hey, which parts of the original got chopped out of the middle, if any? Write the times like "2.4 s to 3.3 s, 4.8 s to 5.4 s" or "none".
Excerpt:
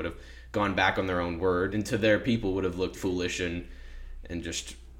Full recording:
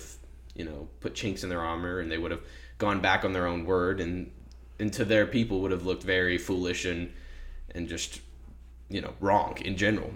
4.0 s to 4.8 s, 6.0 s to 6.4 s

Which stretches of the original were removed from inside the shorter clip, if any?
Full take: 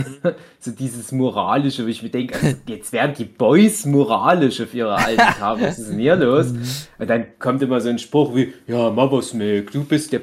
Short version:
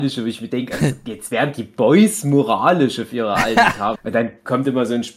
5.6 s to 6.9 s

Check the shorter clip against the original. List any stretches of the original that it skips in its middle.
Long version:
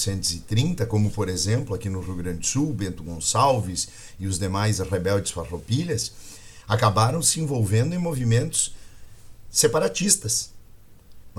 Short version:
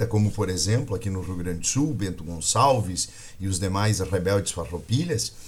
none

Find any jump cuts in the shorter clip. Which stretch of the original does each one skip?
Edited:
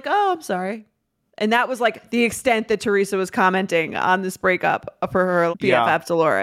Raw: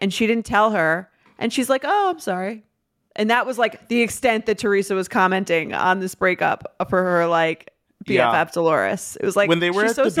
7.3 s to 8.0 s

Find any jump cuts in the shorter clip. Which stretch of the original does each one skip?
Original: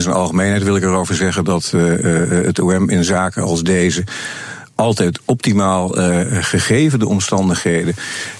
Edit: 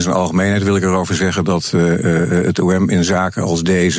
none

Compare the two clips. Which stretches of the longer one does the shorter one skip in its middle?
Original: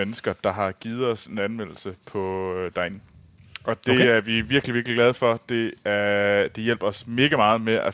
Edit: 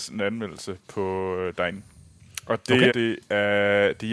4.1 s to 5.4 s

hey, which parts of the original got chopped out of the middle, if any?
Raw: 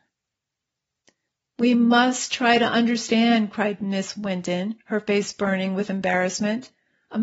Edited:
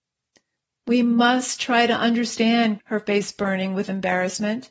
3.5 s to 4.8 s

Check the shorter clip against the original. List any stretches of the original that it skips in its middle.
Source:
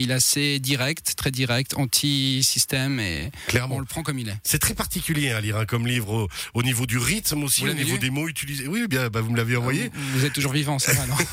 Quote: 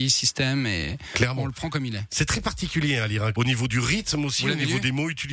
5.7 s to 6.5 s

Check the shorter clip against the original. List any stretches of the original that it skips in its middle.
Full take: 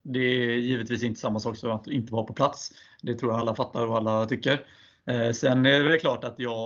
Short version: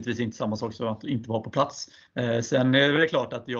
2.9 s to 5.0 s

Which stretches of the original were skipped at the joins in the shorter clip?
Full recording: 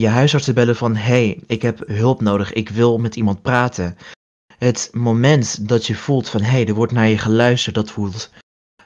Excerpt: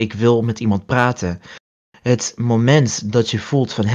none

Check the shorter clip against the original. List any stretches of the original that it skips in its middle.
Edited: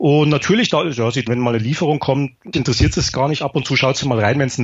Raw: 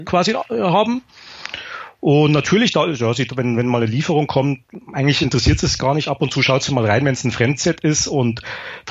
3.3 s to 3.5 s, 4.8 s to 5.2 s

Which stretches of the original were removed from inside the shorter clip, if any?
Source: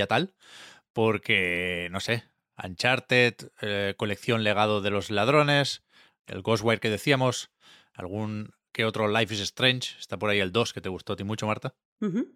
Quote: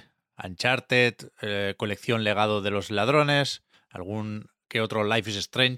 5.9 s to 7.8 s

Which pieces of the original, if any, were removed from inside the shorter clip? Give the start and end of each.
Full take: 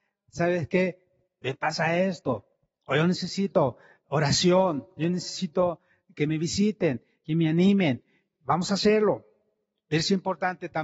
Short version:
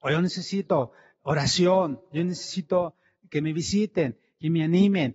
none

